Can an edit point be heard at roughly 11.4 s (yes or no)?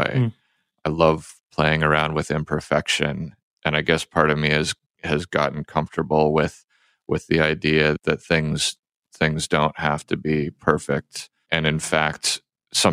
no